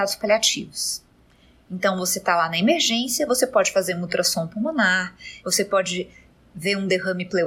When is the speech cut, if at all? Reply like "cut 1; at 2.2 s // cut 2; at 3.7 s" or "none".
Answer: cut 1; at 1.6 s // cut 2; at 5.4 s

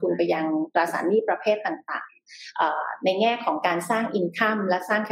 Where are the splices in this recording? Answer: none

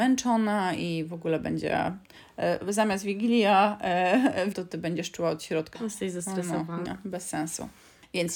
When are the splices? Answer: cut 1; at 4.5 s // cut 2; at 5.7 s // cut 3; at 6.9 s

